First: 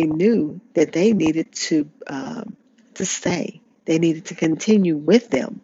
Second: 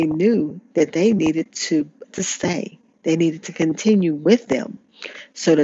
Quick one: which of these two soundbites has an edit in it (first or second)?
second